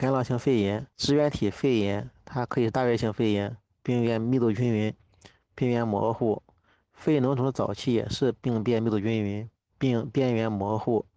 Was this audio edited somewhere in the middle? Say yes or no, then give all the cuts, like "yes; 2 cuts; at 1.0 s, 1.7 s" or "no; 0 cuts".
yes; 1 cut; at 0.9 s